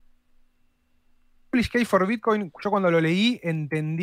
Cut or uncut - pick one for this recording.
uncut